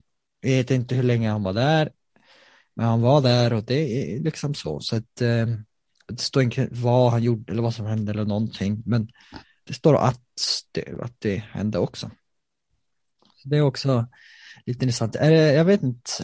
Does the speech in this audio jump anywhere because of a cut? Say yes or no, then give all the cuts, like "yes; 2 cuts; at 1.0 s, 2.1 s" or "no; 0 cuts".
no; 0 cuts